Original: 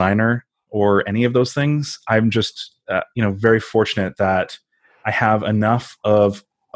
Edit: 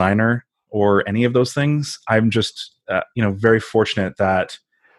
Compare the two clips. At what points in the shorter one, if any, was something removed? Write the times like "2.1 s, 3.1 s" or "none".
none